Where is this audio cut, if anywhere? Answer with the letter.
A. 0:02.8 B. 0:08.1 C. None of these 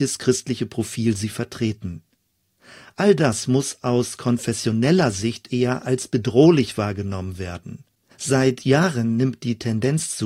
B